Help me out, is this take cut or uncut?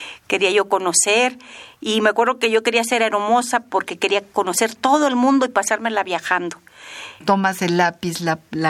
cut